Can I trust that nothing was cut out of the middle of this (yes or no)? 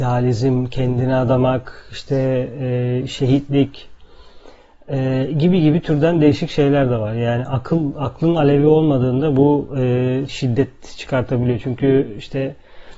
no